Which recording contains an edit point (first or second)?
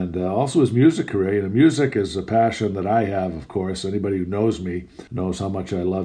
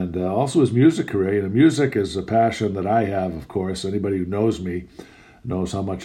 first